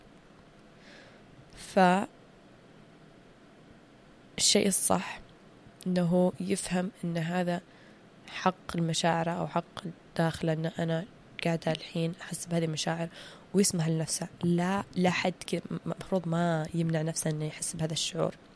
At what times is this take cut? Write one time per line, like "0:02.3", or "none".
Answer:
0:05.8